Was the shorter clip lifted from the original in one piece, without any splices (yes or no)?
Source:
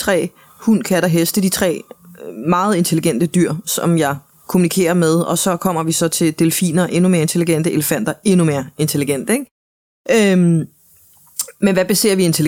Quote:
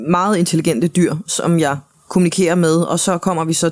yes